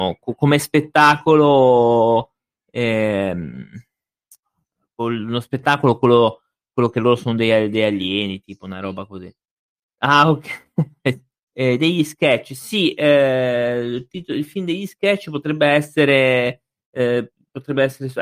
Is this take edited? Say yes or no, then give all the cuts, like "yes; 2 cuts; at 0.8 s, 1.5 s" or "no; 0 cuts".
yes; 1 cut; at 11.5 s